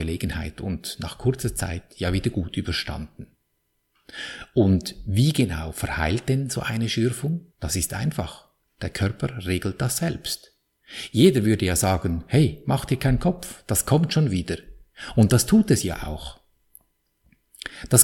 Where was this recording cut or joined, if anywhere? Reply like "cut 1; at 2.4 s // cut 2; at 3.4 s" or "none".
cut 1; at 7.5 s